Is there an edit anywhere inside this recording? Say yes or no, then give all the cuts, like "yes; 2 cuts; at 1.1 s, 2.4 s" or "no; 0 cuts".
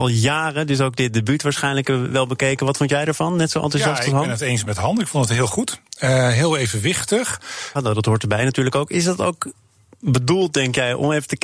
yes; 1 cut; at 7.7 s